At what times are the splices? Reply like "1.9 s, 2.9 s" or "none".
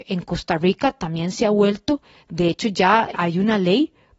3.1 s